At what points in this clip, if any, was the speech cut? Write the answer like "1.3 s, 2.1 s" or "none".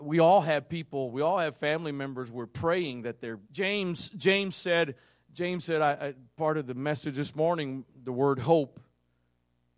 3.4 s